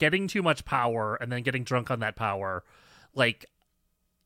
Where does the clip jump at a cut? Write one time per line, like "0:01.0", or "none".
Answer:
none